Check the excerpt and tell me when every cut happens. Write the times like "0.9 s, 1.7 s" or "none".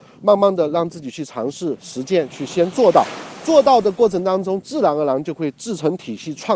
none